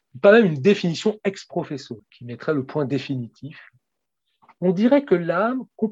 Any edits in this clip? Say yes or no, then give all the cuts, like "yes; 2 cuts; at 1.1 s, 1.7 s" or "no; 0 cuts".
yes; 2 cuts; at 2.0 s, 4.6 s